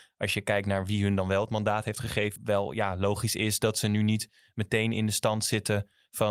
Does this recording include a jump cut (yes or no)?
yes